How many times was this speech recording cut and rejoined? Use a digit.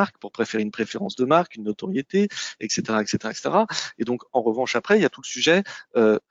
0